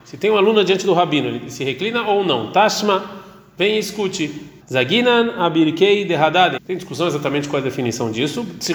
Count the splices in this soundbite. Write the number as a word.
two